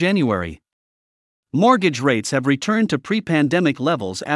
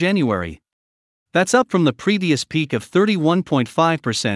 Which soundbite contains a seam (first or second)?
second